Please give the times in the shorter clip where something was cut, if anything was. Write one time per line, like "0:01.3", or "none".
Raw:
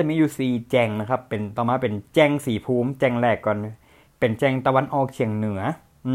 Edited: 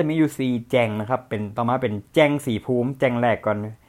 none